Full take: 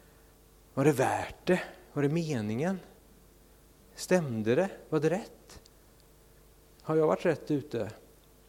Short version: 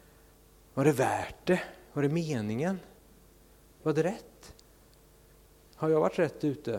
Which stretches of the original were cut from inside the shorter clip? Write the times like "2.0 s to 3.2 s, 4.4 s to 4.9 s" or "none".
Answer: 3.8 s to 4.9 s